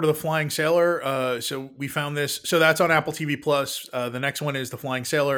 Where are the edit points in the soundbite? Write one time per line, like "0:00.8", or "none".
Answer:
none